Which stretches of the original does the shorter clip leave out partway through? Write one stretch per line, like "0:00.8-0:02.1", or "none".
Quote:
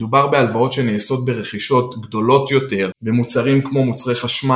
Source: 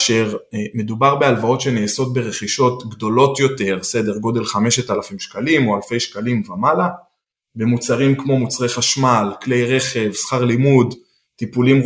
0:03.8-0:07.5